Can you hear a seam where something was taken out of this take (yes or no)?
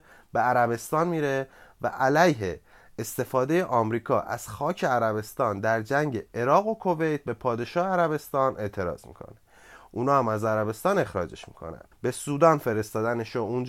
yes